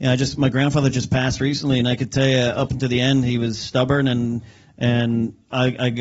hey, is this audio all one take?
yes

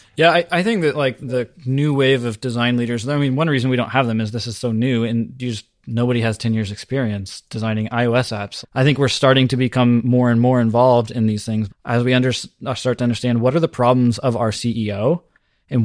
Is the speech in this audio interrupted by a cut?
yes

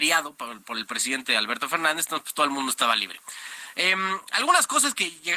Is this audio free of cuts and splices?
yes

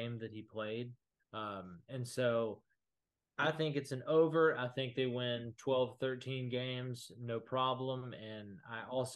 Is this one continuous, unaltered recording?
no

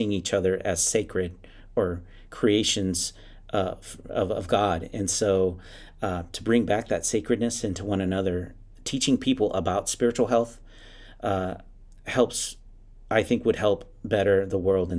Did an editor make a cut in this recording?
no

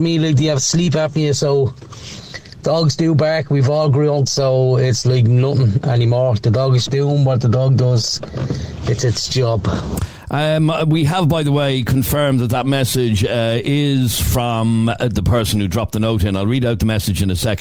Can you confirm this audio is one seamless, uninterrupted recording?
no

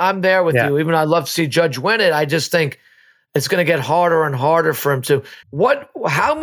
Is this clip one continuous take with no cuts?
no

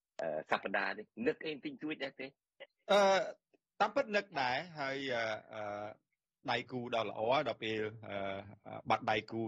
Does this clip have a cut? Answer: no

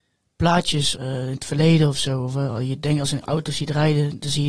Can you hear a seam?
yes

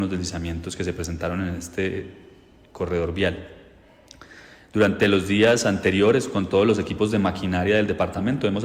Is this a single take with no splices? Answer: yes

